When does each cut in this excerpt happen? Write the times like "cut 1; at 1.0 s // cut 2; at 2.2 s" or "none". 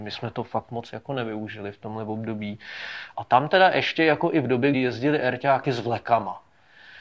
cut 1; at 3.1 s // cut 2; at 4.7 s